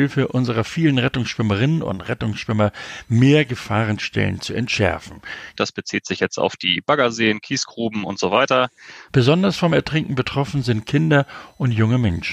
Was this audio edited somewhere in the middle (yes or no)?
yes